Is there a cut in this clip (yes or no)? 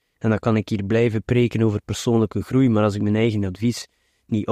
no